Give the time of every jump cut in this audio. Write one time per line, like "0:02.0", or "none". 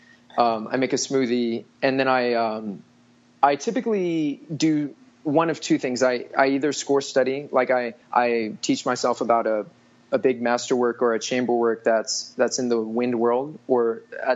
0:08.0